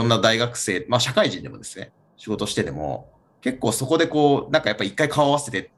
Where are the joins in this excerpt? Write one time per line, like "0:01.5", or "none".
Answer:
none